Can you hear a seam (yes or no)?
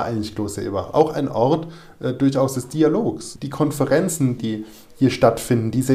no